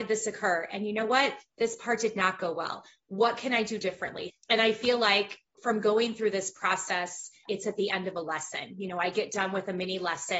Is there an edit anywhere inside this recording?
yes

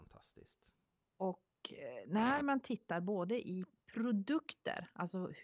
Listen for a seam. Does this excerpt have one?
no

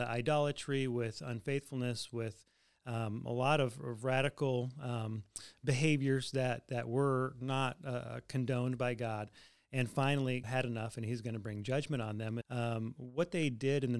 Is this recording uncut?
no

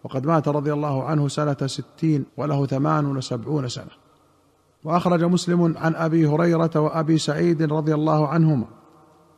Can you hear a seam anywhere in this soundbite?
yes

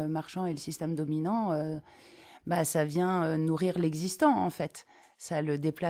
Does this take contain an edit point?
no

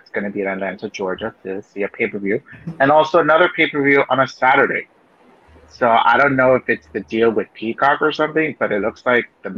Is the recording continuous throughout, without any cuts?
yes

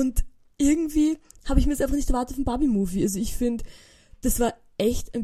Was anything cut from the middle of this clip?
no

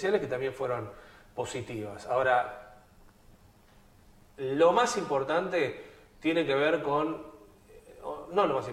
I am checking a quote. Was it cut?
no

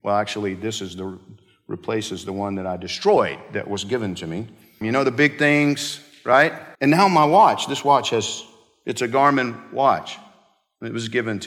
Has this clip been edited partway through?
yes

